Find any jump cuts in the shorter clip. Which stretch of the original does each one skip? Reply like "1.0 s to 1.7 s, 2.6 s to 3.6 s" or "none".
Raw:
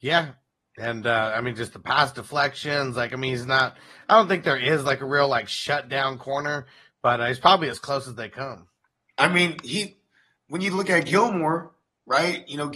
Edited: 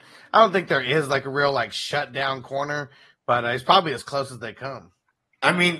none

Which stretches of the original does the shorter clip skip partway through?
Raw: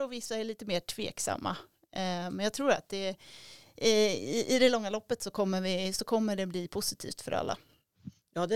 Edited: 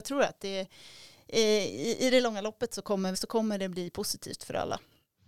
5.6 s to 5.9 s

